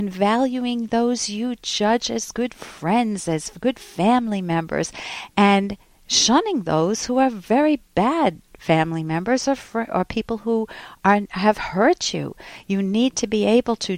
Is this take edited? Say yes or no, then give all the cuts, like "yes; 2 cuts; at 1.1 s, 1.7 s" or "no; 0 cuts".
no; 0 cuts